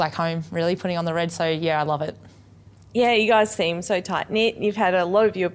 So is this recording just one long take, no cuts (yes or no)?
yes